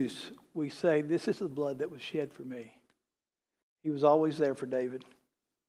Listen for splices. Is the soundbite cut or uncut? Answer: cut